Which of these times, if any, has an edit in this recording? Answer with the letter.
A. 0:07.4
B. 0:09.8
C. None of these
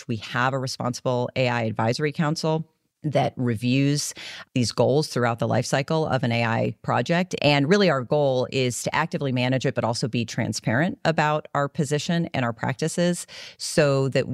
A